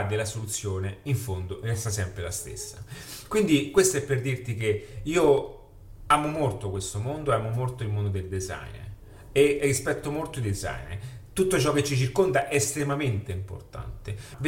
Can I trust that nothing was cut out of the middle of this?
yes; 0 cuts

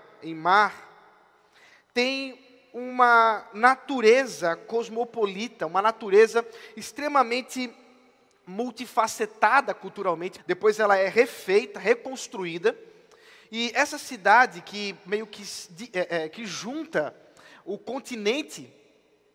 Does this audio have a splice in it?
yes; 1 cut; at 10.4 s

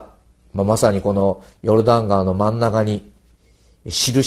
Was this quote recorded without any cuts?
yes; 0 cuts

